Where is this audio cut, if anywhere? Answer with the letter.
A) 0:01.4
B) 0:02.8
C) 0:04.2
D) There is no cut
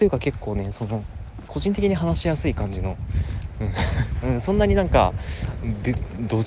C